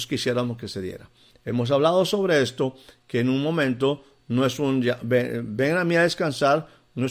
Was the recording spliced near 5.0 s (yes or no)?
no